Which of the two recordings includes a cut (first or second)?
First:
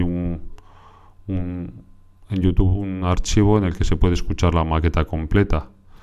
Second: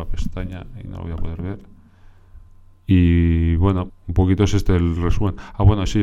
second